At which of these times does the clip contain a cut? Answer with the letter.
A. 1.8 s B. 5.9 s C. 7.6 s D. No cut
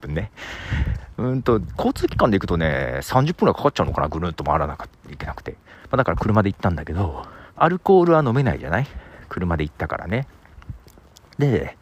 C